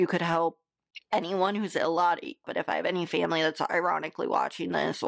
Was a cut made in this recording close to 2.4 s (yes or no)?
yes